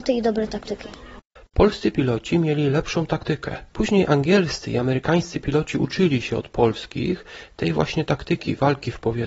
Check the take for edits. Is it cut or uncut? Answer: cut